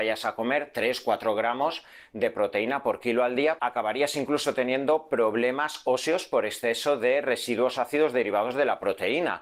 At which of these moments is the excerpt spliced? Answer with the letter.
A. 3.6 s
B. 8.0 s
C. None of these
A